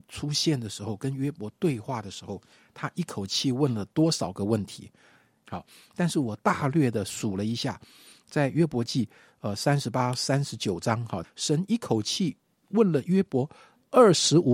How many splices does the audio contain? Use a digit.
2